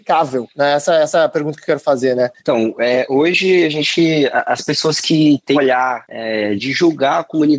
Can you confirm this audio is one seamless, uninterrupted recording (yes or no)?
no